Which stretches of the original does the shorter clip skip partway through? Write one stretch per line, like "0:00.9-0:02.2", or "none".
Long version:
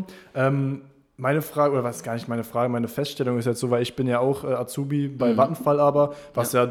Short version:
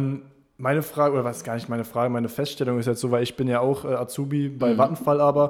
none